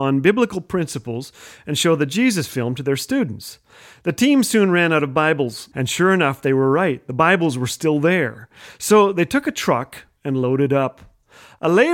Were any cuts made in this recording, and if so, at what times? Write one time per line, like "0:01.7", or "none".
0:05.7